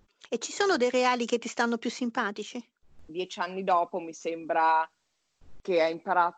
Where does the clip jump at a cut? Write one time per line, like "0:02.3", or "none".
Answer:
0:03.1